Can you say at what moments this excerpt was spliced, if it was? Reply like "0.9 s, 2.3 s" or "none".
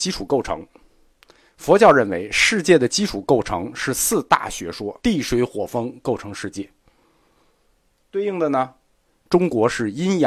5.0 s